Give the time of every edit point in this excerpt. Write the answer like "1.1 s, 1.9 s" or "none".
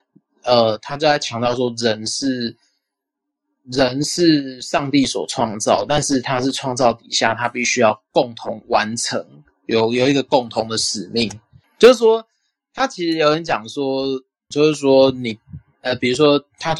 11.6 s, 14.5 s

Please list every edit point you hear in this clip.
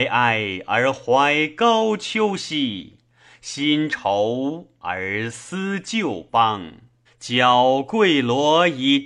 3.9 s, 7.1 s

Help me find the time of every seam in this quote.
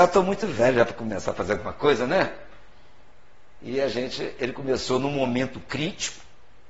none

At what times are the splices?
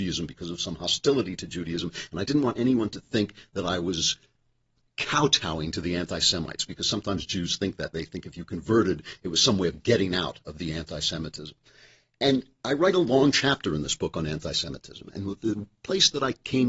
none

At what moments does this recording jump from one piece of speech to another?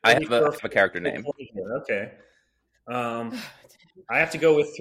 none

